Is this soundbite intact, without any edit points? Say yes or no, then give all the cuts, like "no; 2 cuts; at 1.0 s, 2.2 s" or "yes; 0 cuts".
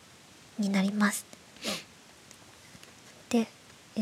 yes; 0 cuts